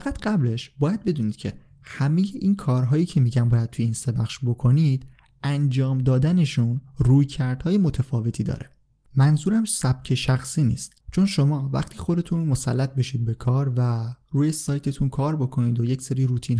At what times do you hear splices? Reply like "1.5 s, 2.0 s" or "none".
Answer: 11.0 s